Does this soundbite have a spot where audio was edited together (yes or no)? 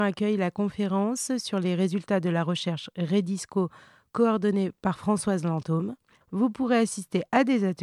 yes